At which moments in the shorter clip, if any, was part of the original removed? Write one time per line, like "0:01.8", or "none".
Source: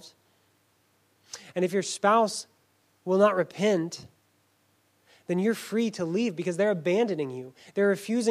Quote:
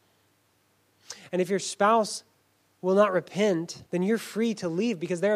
0:03.9